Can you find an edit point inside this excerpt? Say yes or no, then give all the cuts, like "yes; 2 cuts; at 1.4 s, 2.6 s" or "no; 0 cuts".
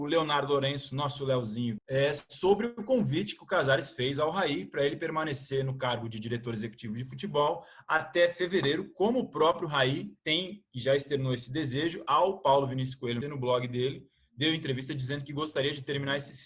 yes; 3 cuts; at 1.8 s, 10.2 s, 13.2 s